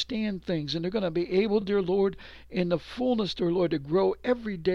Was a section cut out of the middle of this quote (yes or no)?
no